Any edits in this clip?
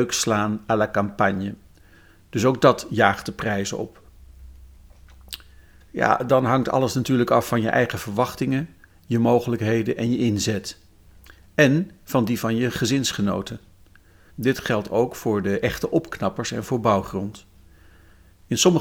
yes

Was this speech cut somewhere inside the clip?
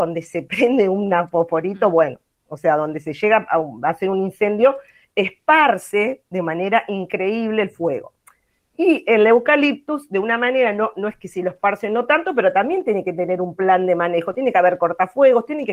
no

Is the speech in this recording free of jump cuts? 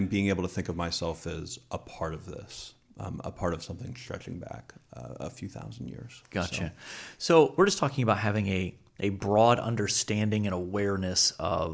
no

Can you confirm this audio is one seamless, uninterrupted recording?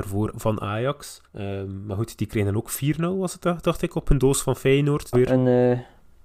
no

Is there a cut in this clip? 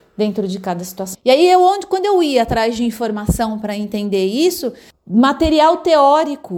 yes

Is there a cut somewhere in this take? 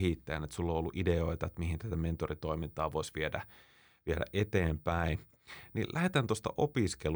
no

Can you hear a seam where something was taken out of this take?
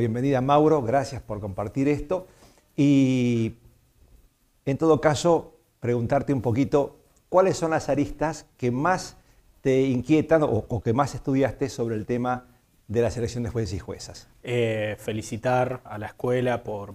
yes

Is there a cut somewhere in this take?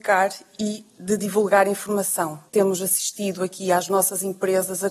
yes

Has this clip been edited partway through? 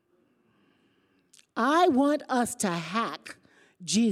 no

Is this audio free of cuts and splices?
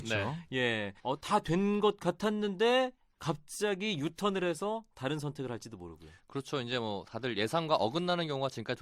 no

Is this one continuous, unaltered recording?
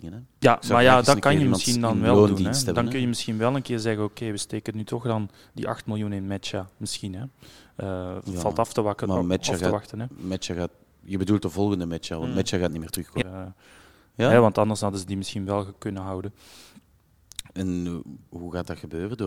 no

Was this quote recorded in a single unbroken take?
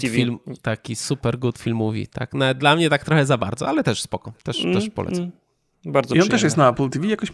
yes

